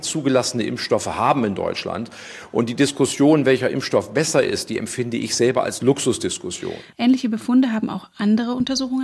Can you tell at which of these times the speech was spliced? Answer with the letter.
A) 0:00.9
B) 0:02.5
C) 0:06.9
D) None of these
C